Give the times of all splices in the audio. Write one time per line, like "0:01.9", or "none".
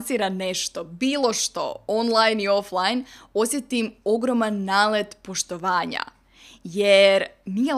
none